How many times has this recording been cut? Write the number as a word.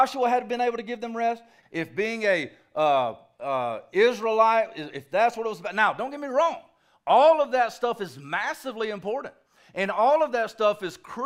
one